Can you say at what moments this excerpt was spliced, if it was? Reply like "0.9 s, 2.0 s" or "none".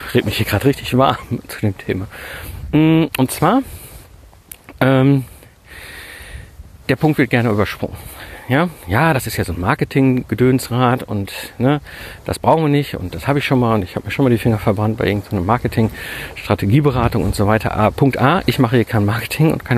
none